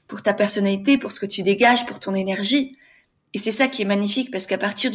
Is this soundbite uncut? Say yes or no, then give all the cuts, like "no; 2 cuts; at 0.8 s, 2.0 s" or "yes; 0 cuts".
yes; 0 cuts